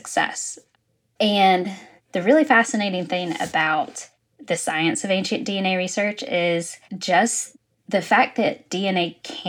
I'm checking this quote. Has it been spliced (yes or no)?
yes